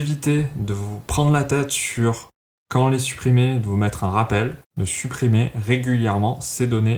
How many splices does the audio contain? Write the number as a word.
one